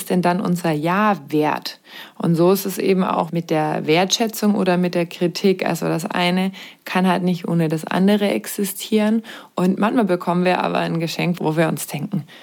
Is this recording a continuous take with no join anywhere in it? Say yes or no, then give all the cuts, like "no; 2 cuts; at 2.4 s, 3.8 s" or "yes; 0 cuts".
no; 2 cuts; at 9.5 s, 11.4 s